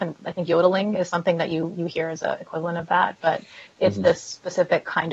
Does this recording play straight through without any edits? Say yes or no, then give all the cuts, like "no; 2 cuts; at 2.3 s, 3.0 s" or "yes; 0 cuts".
yes; 0 cuts